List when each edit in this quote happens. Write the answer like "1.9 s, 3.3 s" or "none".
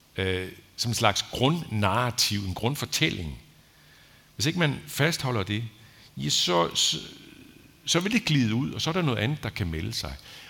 none